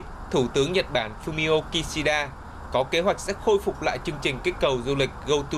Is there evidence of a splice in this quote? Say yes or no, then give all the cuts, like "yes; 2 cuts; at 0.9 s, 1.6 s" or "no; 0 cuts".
no; 0 cuts